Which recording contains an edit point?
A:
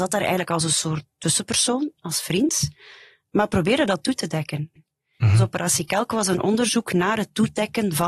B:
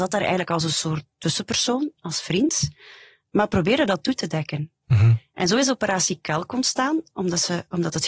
A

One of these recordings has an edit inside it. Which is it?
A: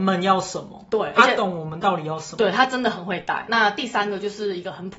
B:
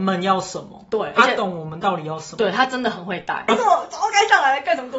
B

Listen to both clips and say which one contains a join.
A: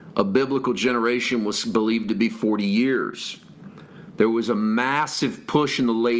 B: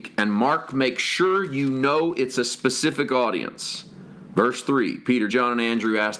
B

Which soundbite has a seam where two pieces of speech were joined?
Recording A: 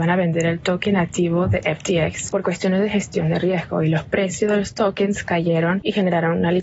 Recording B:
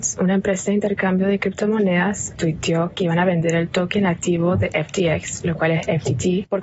A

